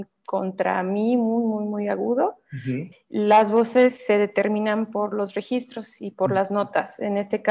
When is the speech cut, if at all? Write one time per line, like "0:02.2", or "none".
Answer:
0:02.9